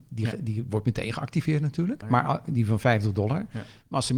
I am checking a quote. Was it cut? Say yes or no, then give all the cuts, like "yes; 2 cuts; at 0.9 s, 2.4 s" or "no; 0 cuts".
yes; 1 cut; at 2.0 s